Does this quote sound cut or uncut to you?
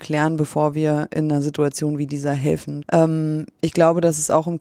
cut